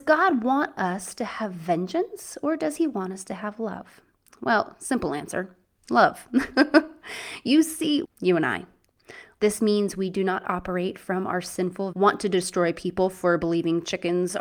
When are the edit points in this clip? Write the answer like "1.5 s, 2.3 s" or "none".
8.0 s, 9.4 s, 11.9 s